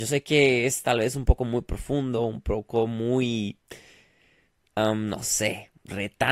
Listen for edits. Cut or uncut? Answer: uncut